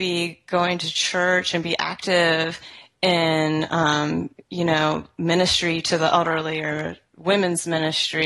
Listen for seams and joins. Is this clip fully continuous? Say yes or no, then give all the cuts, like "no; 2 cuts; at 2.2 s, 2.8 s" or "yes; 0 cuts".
yes; 0 cuts